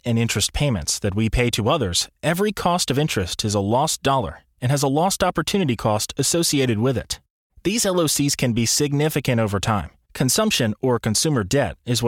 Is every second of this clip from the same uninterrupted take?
no; 2 cuts; at 7.5 s, 10.0 s

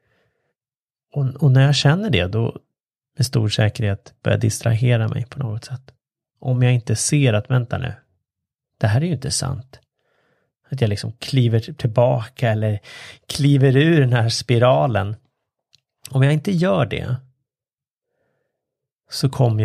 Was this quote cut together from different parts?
no; 0 cuts

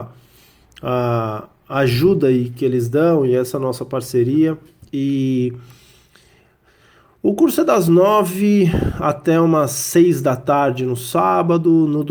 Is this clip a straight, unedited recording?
yes; 0 cuts

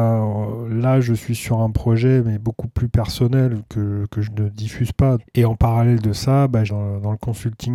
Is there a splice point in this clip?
yes; 2 cuts; at 5.2 s, 6.7 s

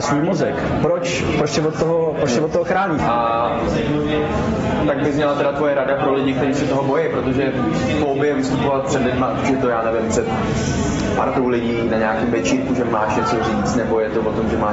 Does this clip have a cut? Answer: yes; 1 cut; at 3.0 s

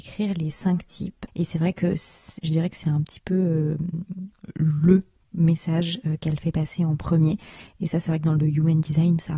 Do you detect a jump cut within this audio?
yes; 1 cut; at 1.3 s

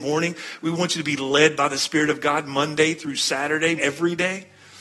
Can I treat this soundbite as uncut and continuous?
no; 1 cut; at 3.8 s

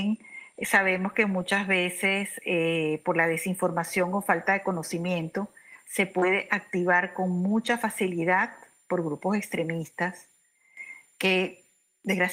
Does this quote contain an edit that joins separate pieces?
no; 0 cuts

